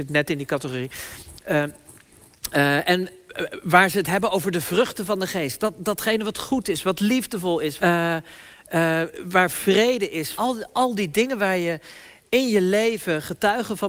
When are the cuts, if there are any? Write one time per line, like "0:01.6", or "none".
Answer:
0:07.8
0:10.3